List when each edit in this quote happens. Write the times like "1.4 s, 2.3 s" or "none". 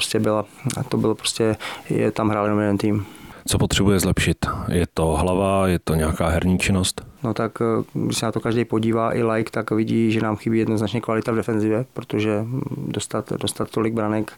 3.5 s